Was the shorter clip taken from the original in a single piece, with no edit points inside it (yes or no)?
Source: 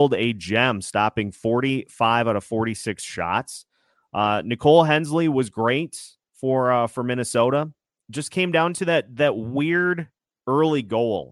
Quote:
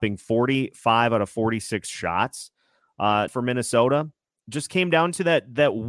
no